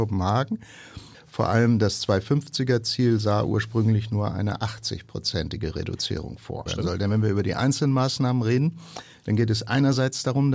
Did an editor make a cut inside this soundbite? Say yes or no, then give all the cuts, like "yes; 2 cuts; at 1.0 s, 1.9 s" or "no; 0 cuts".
yes; 2 cuts; at 1.1 s, 6.7 s